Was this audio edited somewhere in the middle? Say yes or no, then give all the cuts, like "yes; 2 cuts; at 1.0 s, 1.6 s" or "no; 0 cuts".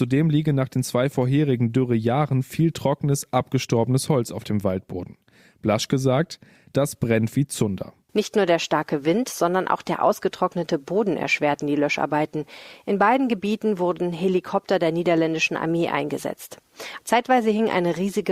yes; 2 cuts; at 8.1 s, 17.0 s